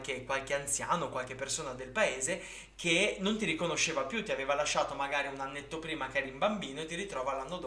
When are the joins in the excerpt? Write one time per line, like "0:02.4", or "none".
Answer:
none